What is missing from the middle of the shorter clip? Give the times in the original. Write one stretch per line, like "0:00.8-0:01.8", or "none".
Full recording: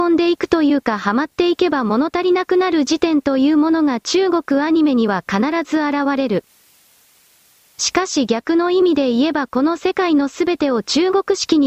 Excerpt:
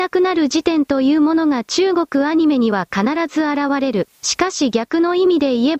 0:06.5-0:07.7